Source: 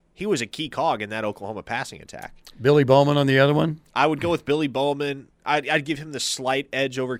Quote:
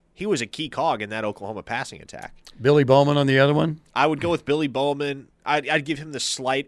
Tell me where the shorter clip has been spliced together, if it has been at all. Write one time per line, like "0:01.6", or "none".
none